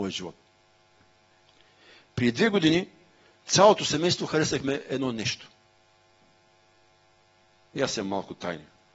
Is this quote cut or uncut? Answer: uncut